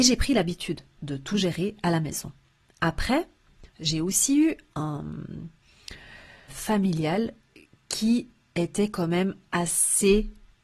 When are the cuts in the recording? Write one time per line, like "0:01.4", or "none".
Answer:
0:01.0
0:06.5